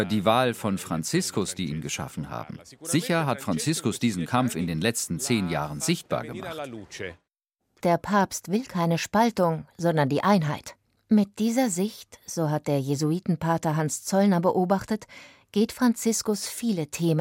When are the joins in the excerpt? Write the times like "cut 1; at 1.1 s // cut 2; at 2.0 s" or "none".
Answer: none